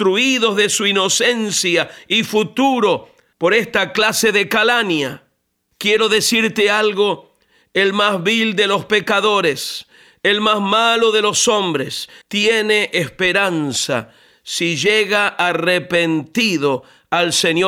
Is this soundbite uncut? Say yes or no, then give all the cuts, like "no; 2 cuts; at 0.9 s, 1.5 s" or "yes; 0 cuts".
no; 1 cut; at 12.2 s